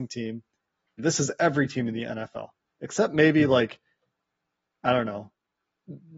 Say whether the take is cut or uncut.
cut